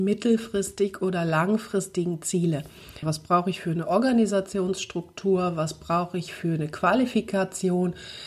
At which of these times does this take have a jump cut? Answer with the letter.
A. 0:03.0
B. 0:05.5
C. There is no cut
A